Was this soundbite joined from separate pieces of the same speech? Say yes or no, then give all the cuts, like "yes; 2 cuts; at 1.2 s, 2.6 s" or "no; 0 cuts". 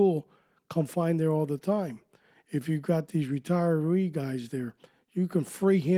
no; 0 cuts